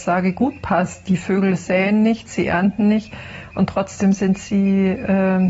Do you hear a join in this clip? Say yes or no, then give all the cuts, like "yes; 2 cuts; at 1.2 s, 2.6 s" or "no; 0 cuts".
no; 0 cuts